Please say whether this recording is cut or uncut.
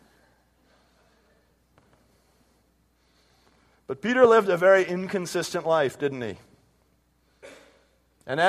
uncut